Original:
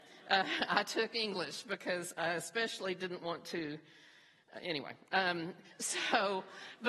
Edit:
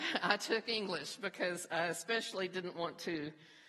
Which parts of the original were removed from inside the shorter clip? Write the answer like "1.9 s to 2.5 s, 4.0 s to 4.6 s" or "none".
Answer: none